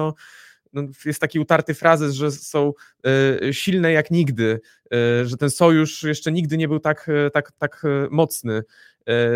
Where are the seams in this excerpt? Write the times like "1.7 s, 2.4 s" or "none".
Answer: none